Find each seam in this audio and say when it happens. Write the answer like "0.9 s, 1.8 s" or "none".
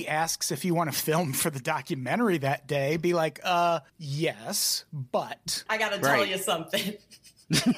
5.7 s